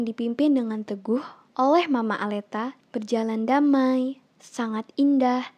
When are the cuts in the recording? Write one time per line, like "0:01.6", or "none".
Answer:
none